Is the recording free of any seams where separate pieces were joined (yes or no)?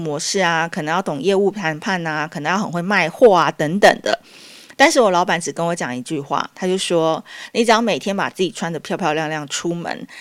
yes